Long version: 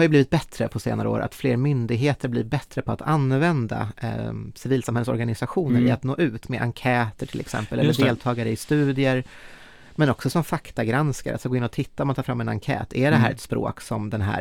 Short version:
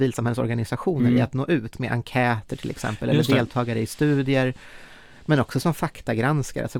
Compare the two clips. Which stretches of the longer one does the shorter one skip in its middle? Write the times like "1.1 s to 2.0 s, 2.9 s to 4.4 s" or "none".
none